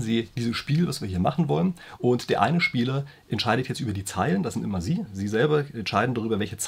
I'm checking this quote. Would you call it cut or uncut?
cut